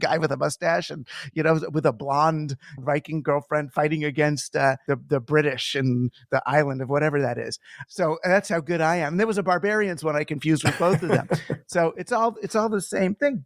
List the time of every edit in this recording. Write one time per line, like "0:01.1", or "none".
0:02.8
0:04.9